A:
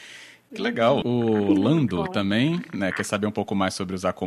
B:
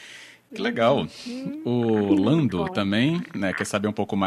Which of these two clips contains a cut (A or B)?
A